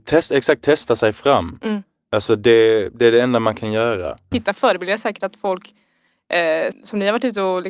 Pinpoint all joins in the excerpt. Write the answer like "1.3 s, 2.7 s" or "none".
4.3 s, 6.7 s